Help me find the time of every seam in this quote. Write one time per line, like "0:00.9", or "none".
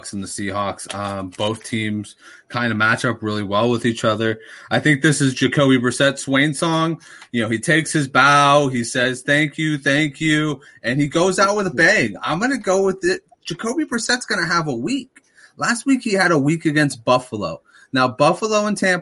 none

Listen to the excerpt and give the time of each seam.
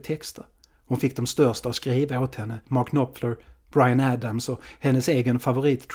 0:02.6

